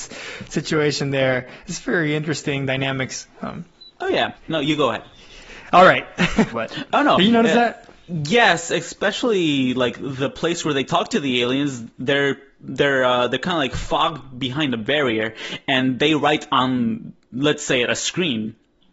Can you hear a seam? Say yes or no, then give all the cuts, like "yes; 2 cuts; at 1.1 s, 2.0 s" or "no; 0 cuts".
yes; 2 cuts; at 4.3 s, 6.5 s